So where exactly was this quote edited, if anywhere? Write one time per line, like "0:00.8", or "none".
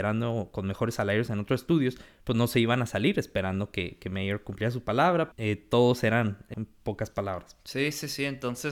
0:05.3
0:06.5